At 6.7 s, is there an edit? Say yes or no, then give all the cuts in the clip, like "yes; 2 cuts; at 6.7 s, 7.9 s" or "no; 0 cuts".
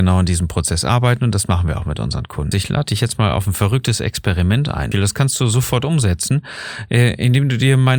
no; 2 cuts; at 2.5 s, 4.9 s